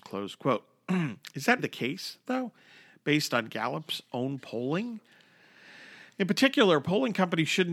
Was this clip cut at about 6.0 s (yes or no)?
no